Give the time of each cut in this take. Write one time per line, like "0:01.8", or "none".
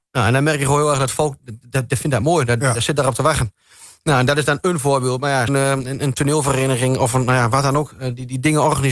0:05.5